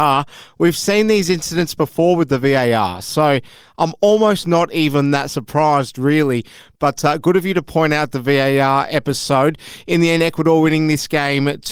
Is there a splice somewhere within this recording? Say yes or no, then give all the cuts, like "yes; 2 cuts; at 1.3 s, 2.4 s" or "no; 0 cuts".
no; 0 cuts